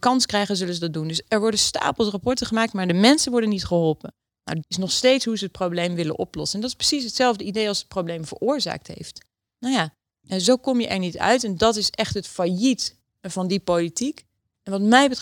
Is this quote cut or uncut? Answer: cut